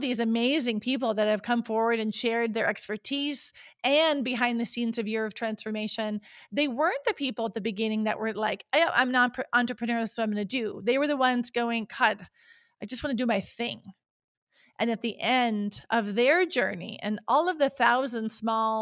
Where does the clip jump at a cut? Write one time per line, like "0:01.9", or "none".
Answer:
none